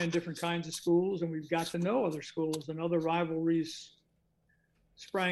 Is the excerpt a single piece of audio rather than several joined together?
yes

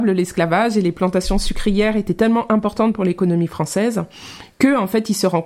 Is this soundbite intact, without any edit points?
yes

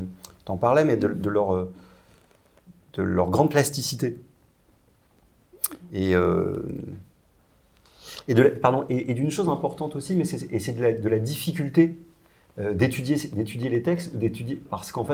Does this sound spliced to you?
no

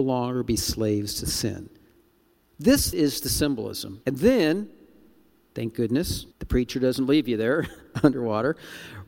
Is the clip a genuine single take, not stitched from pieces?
no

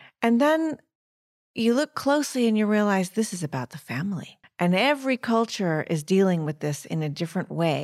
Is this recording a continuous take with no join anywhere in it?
no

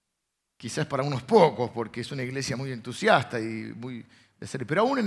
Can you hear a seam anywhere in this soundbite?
no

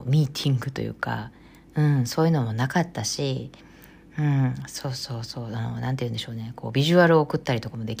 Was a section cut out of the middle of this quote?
no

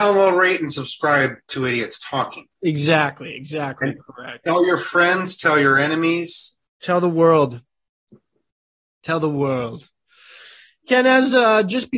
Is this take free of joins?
no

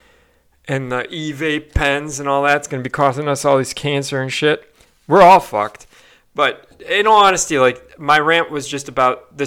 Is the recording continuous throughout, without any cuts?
yes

